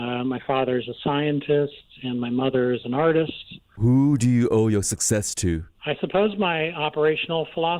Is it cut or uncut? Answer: cut